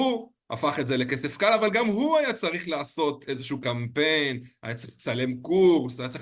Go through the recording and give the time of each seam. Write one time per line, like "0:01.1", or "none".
none